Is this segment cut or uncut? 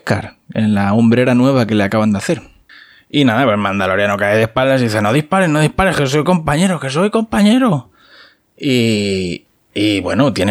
uncut